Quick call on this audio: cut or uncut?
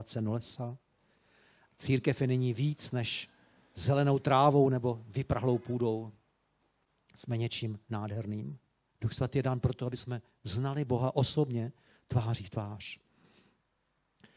cut